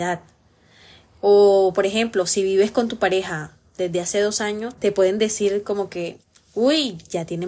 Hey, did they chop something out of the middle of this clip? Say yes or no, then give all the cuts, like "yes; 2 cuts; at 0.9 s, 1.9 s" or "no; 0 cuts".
yes; 1 cut; at 4.8 s